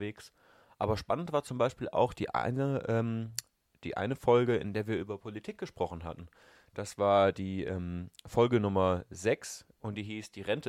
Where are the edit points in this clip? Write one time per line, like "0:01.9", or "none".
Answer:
none